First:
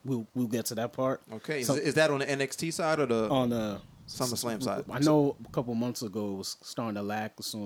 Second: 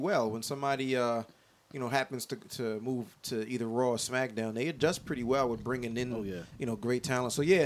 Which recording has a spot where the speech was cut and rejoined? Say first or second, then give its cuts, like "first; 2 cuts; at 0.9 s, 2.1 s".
first; 1 cut; at 4.9 s